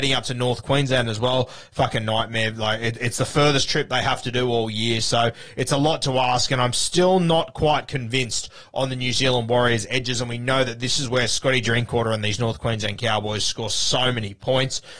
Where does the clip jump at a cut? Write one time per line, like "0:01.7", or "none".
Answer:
none